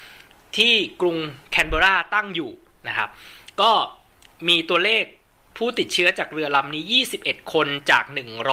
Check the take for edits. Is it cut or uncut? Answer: uncut